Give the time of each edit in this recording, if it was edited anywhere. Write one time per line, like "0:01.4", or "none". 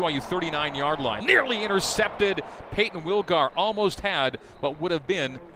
0:01.2